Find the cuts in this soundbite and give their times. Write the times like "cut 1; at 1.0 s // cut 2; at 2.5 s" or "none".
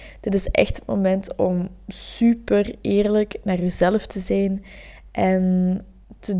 none